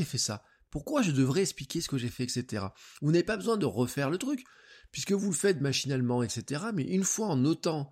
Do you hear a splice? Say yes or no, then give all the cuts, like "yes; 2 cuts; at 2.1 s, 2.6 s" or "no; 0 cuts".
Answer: no; 0 cuts